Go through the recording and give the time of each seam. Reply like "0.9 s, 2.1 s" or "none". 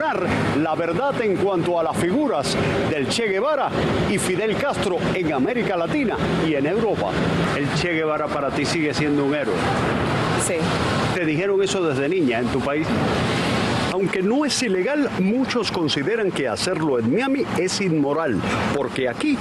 13.9 s